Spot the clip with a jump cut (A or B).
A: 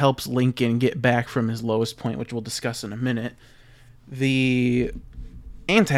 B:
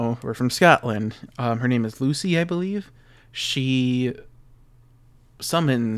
B